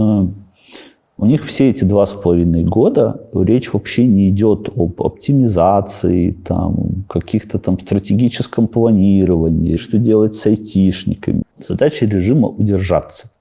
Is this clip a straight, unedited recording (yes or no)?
no